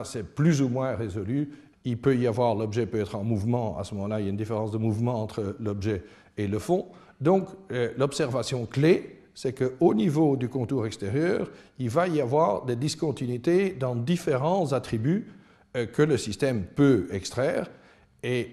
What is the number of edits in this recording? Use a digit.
1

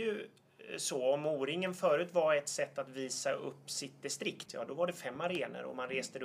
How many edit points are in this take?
1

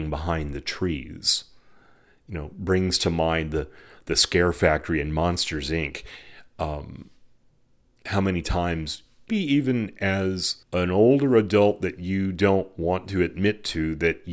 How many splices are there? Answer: 2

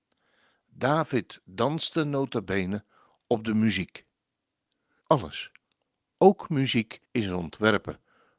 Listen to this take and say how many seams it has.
2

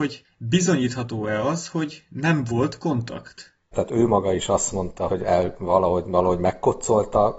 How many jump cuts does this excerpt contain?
2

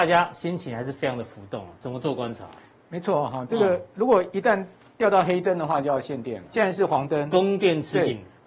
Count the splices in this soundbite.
1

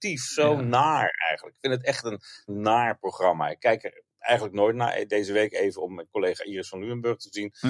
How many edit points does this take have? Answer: 1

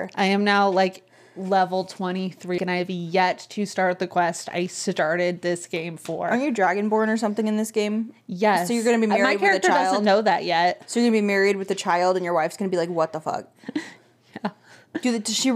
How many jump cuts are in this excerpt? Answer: 1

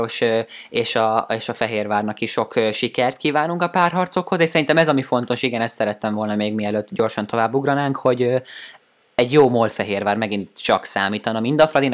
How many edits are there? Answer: 0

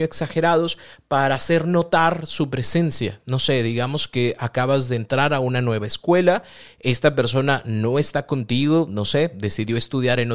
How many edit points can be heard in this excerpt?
0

